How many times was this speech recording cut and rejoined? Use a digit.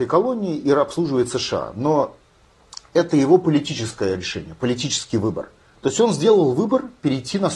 0